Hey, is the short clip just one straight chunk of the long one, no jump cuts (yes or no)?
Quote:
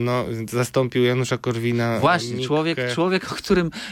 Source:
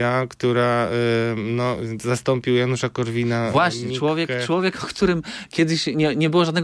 yes